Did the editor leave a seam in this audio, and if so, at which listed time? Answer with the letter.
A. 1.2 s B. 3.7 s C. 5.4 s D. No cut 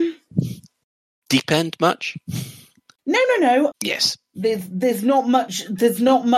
B